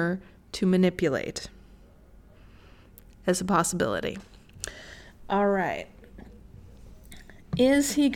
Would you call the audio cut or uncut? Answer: uncut